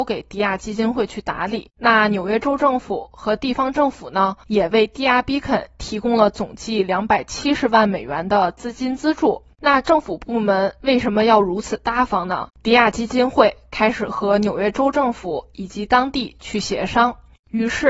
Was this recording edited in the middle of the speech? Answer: yes; 2 cuts; at 9.5 s, 12.5 s

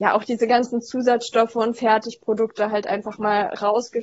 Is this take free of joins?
yes; 0 cuts

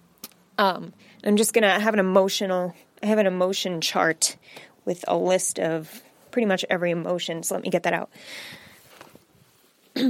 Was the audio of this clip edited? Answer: no; 0 cuts

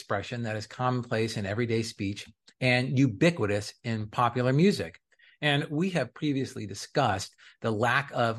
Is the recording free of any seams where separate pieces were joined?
yes; 0 cuts

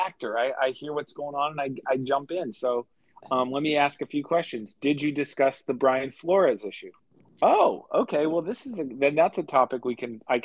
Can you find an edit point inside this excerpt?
yes; 1 cut; at 7.2 s

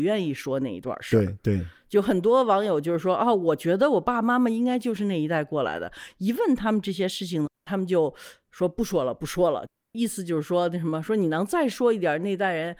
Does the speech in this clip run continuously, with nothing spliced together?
yes; 0 cuts

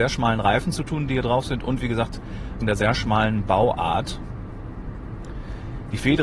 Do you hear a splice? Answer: yes; 1 cut; at 2.6 s

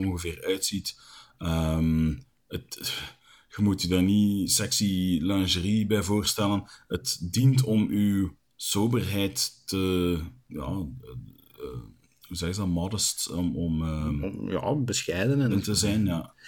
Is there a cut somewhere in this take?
yes; 2 cuts; at 10.5 s, 15.5 s

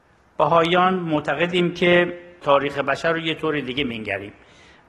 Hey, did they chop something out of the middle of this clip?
no; 0 cuts

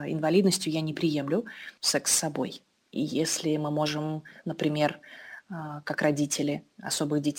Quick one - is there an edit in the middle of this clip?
yes; 1 cut; at 1.8 s

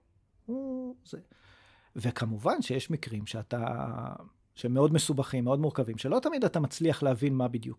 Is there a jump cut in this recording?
no; 0 cuts

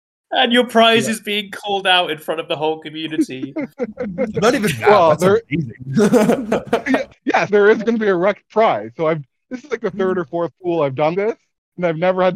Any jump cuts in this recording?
yes; 2 cuts; at 7.5 s, 11.1 s

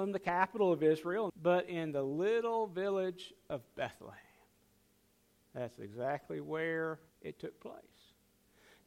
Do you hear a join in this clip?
yes; 3 cuts; at 1.3 s, 5.4 s, 7.1 s

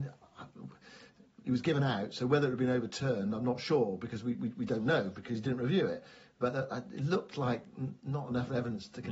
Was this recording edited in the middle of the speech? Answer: no; 0 cuts

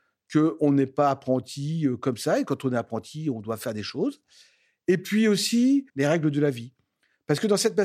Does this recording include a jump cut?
yes; 1 cut; at 5.9 s

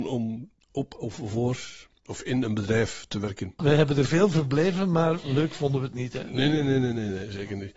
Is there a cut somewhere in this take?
yes; 1 cut; at 3.6 s

